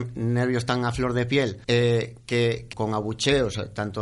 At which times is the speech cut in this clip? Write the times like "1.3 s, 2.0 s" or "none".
1.6 s, 2.7 s